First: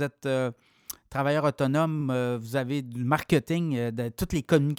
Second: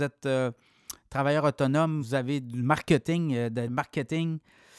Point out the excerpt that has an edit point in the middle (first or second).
second